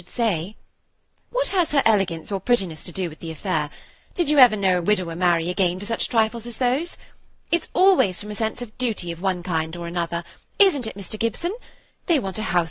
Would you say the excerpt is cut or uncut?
cut